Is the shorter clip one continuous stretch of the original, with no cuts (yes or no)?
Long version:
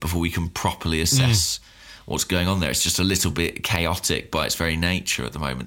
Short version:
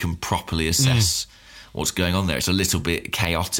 no